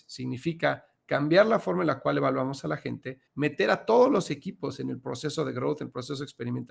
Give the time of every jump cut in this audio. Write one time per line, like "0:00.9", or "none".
0:03.3

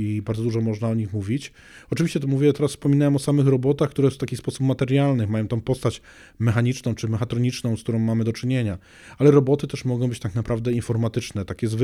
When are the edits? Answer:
none

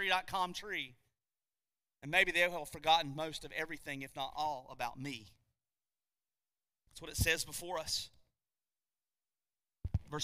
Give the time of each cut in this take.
none

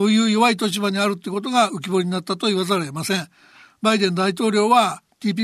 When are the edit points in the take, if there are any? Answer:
none

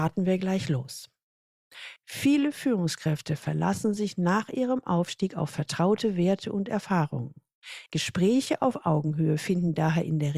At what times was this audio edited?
0:02.0
0:07.9

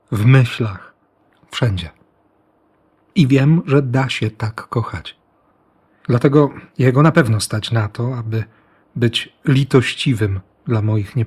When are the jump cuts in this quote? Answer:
none

